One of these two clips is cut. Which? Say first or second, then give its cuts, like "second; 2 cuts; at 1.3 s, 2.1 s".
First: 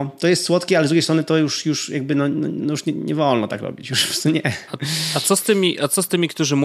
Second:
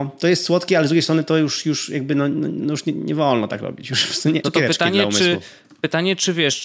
second; 1 cut; at 4.4 s